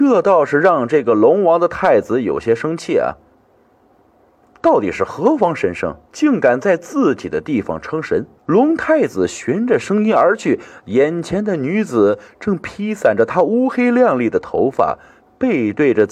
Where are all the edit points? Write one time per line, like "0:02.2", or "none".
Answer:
0:06.1
0:08.4